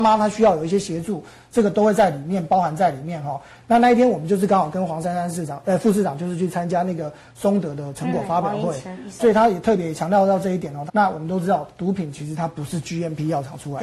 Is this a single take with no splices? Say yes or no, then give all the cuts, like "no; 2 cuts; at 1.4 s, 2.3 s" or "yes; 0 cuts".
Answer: no; 2 cuts; at 9.2 s, 10.9 s